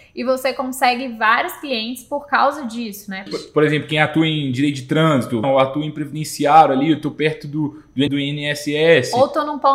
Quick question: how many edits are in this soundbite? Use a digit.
3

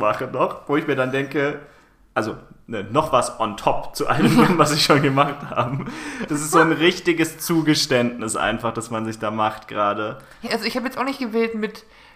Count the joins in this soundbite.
2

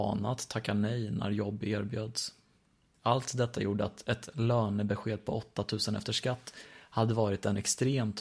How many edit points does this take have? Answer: 0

